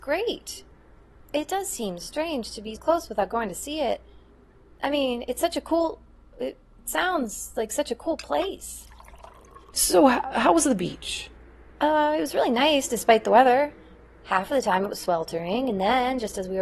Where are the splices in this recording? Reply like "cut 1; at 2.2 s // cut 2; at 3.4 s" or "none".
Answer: cut 1; at 2.8 s // cut 2; at 9.7 s